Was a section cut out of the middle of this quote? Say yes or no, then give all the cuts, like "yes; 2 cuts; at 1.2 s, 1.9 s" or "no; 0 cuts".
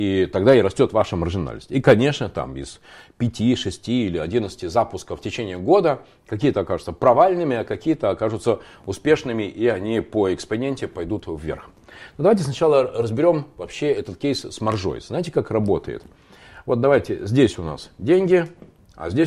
no; 0 cuts